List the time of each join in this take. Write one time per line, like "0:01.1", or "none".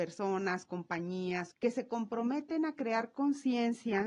0:01.5